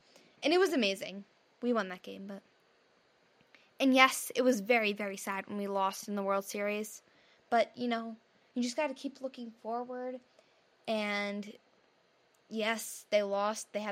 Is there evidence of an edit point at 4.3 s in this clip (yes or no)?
no